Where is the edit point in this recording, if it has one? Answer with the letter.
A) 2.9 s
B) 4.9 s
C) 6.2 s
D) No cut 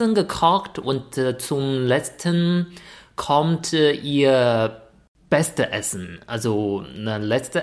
D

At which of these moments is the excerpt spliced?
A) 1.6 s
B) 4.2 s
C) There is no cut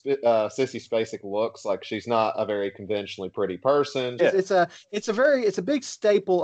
B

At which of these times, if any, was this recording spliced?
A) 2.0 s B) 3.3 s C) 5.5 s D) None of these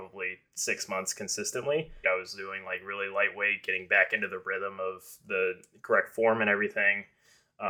A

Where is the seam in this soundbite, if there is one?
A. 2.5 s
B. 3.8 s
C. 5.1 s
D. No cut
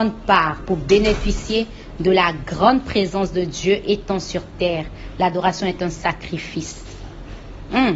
D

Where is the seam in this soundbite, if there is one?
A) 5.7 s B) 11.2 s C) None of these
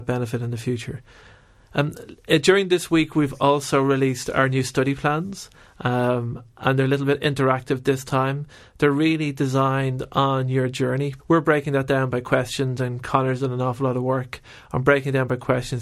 B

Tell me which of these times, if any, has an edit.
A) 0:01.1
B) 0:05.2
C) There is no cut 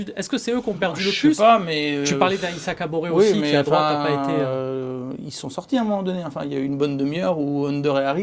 C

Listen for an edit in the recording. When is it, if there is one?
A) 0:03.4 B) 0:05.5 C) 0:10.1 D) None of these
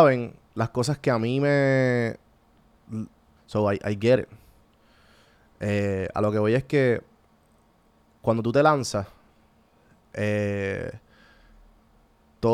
A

